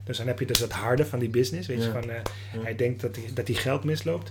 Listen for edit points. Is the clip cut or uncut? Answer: uncut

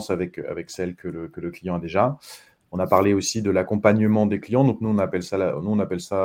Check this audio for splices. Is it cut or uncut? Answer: uncut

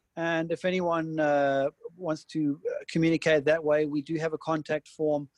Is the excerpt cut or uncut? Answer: uncut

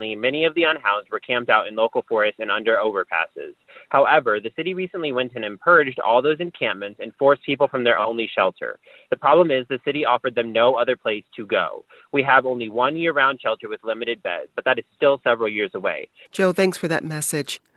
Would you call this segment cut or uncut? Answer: cut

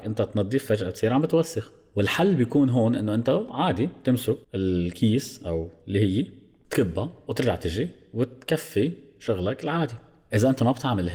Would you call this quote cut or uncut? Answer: cut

